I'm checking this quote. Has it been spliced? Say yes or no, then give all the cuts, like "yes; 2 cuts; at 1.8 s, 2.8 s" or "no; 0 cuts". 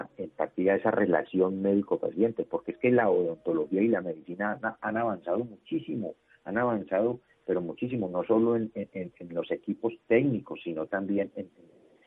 no; 0 cuts